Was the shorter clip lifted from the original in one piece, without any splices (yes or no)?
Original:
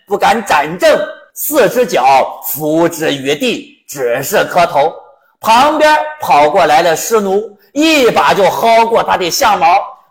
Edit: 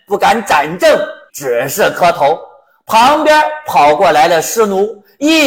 no